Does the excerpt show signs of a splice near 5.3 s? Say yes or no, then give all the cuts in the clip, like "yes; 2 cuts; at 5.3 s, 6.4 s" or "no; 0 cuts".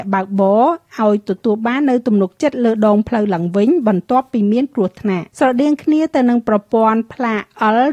yes; 1 cut; at 5.3 s